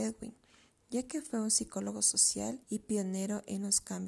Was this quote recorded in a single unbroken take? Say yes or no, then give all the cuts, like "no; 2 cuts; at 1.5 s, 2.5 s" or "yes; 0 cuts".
no; 1 cut; at 2.6 s